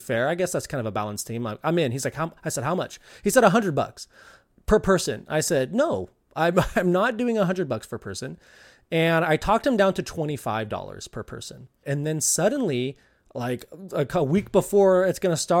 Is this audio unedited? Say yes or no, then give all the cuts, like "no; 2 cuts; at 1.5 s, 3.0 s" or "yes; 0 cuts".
no; 1 cut; at 11.8 s